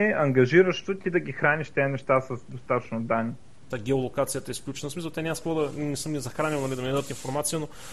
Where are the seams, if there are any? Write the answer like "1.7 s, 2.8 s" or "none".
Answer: 3.7 s